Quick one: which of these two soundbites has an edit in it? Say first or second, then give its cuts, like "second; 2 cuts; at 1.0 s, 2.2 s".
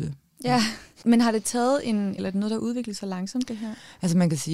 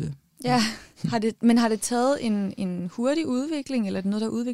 first; 2 cuts; at 1.0 s, 2.2 s